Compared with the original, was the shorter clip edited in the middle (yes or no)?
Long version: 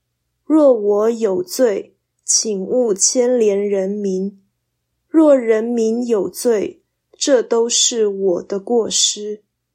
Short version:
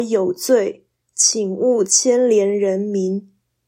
no